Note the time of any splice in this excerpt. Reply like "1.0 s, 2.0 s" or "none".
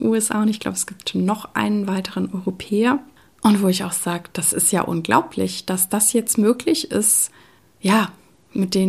none